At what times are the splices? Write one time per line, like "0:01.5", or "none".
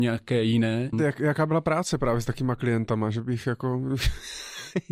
0:00.9